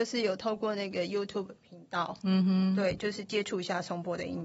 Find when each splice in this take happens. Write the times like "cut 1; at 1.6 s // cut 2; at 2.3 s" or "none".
none

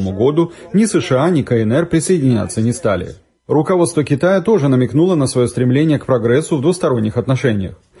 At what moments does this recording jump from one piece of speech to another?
none

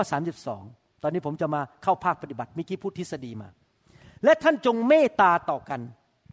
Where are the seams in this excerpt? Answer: none

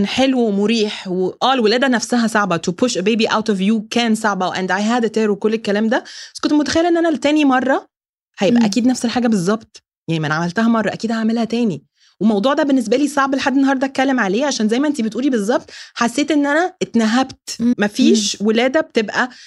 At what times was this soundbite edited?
cut 1; at 17.7 s

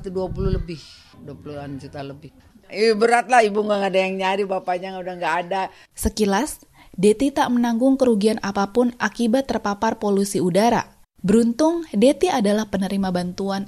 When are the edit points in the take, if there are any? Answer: cut 1; at 11.0 s

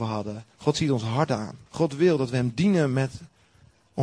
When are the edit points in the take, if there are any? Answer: cut 1; at 1.7 s

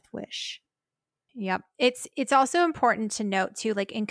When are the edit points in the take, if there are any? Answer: cut 1; at 1.3 s

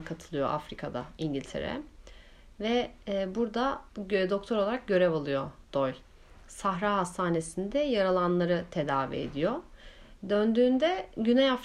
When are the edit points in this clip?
cut 1; at 3.9 s

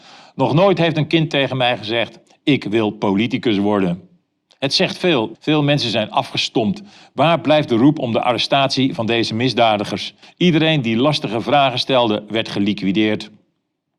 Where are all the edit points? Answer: cut 1; at 5.3 s // cut 2; at 10.2 s

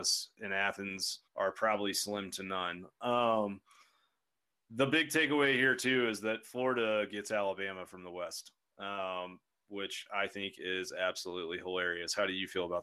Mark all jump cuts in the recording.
cut 1; at 1.3 s

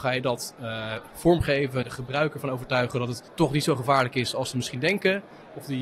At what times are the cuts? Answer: cut 1; at 1.8 s // cut 2; at 3.3 s

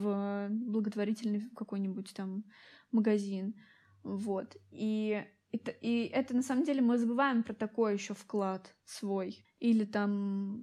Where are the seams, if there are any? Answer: cut 1; at 9.4 s

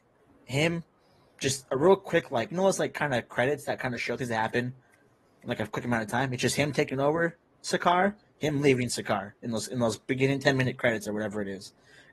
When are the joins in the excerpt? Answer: none

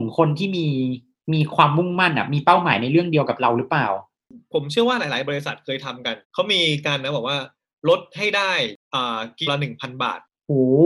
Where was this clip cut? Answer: cut 1; at 6.2 s // cut 2; at 9.5 s

